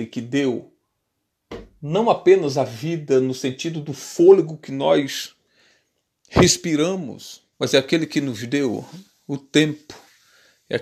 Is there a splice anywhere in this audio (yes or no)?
yes